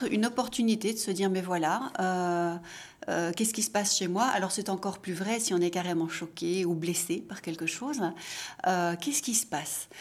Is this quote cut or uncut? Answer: uncut